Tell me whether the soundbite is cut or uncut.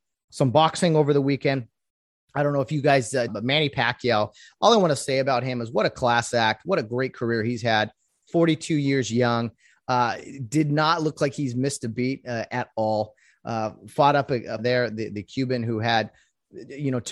cut